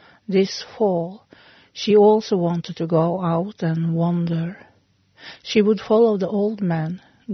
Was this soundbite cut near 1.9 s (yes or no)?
no